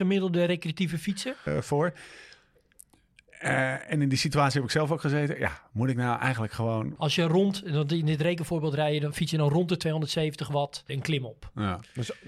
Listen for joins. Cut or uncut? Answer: cut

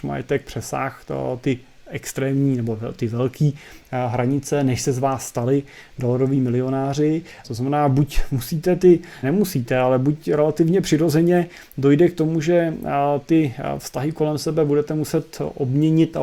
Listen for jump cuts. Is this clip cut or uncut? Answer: cut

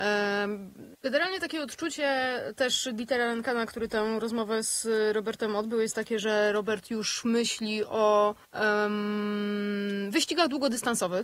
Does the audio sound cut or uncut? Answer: cut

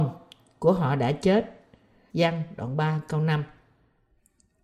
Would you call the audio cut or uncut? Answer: cut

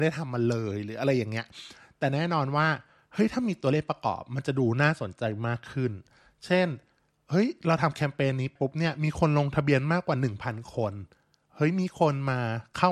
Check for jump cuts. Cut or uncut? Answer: cut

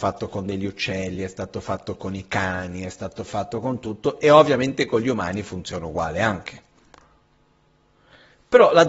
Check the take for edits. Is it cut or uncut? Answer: uncut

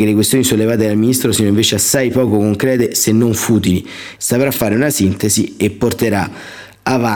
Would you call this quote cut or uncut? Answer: cut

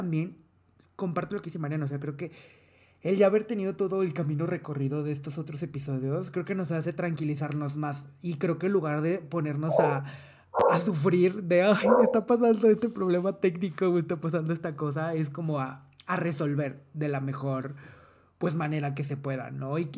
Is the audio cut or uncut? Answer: uncut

